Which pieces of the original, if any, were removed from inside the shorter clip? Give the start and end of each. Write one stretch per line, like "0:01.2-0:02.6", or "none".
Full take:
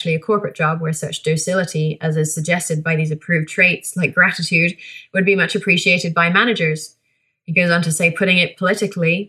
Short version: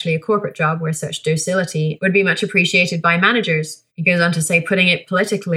0:02.0-0:05.1
0:07.0-0:07.4